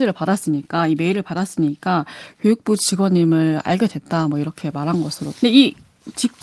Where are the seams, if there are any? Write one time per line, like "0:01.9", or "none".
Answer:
0:05.3